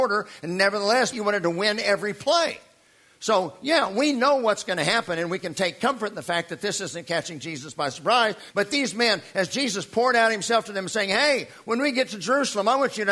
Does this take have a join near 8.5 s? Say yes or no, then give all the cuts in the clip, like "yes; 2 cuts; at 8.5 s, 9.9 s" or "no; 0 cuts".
yes; 2 cuts; at 1.1 s, 8.5 s